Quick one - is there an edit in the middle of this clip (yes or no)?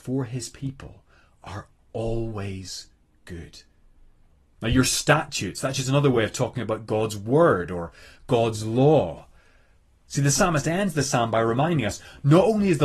yes